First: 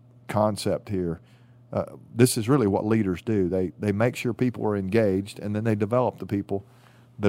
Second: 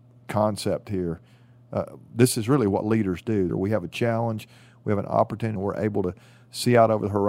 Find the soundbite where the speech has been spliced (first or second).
second